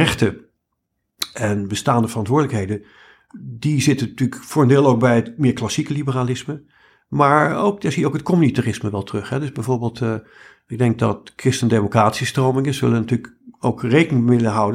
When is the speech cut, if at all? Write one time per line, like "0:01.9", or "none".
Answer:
none